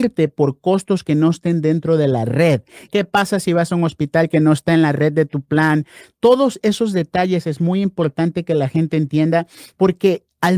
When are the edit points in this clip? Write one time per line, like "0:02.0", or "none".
0:02.9